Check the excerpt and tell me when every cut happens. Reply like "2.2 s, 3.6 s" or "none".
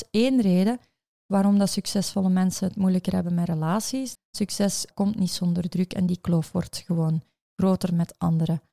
4.2 s